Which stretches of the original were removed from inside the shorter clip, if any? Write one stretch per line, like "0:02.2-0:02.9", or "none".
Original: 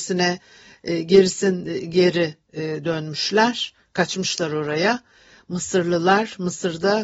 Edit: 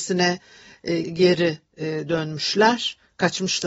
0:01.0-0:01.8